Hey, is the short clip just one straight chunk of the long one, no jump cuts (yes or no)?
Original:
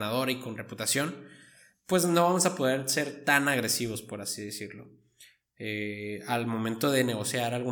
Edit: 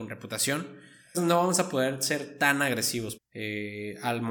no